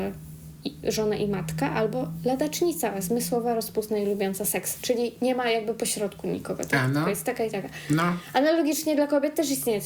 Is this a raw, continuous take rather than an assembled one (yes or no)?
yes